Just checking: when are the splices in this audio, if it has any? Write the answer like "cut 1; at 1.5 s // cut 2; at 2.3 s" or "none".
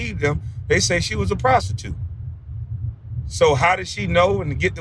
none